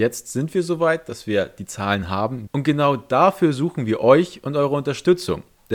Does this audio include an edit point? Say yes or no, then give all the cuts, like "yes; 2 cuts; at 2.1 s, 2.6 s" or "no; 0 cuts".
yes; 1 cut; at 2.5 s